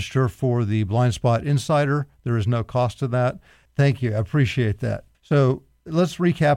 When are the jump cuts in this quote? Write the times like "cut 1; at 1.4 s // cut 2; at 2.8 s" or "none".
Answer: cut 1; at 3.7 s // cut 2; at 5.1 s